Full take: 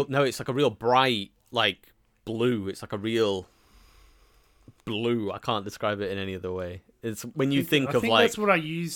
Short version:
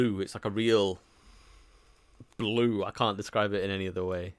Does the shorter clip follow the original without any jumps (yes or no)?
yes